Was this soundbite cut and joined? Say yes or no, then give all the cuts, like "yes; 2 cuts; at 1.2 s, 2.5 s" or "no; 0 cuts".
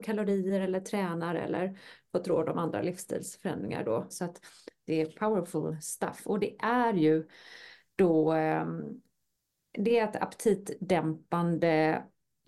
yes; 1 cut; at 4.1 s